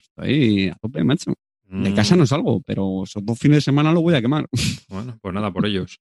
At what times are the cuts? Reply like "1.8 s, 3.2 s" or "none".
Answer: none